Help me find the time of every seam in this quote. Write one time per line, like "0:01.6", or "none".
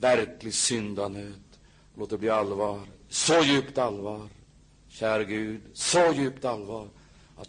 none